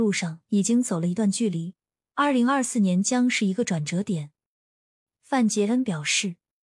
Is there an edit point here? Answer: no; 0 cuts

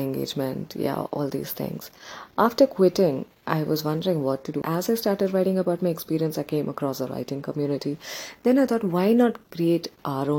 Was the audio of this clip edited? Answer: yes; 1 cut; at 4.6 s

